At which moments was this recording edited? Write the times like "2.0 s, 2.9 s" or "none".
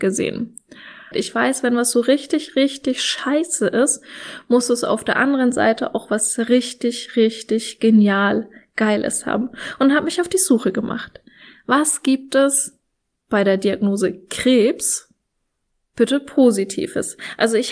1.1 s